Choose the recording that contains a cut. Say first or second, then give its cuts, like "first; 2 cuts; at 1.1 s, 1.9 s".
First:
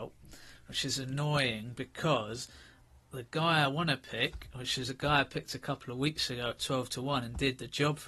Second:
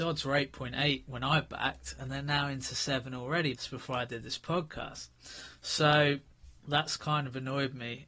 second; 2 cuts; at 3.5 s, 6.6 s